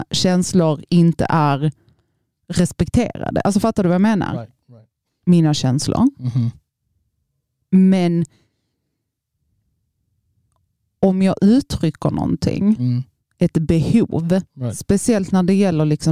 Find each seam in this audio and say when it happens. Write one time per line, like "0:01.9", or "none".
0:05.1